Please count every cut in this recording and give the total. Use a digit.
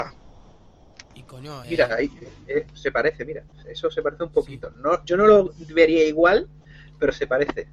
2